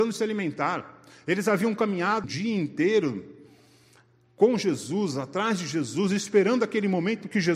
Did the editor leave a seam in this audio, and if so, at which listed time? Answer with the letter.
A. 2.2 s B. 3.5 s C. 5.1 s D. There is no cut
A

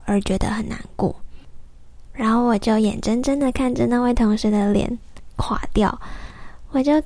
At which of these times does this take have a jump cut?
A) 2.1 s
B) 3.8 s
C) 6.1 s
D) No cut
A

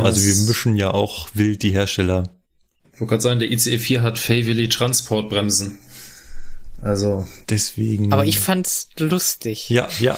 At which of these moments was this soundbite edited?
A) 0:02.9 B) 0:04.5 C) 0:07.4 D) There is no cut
C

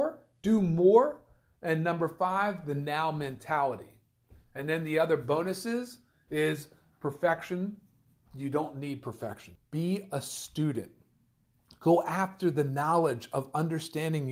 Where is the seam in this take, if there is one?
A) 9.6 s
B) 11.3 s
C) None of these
A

